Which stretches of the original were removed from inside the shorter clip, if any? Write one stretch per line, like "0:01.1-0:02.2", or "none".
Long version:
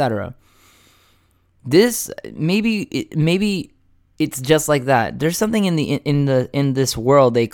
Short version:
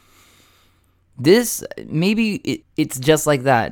0:03.1-0:04.0